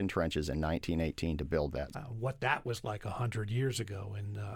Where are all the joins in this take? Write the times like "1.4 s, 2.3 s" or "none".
1.9 s